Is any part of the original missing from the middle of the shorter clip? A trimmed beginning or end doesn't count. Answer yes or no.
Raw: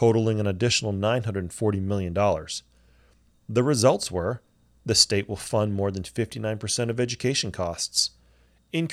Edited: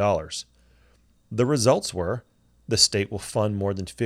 no